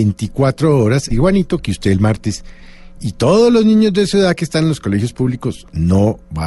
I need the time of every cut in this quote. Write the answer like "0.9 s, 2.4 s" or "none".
1.1 s